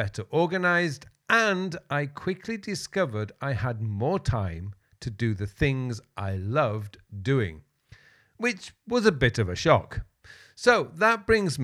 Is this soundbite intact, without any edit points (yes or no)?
yes